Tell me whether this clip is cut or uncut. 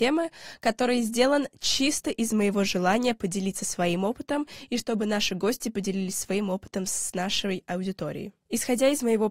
cut